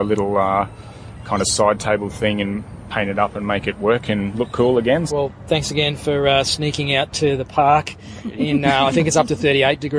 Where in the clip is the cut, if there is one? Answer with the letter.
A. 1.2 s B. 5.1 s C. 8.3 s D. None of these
B